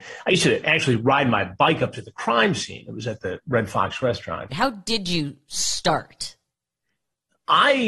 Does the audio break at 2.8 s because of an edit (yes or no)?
no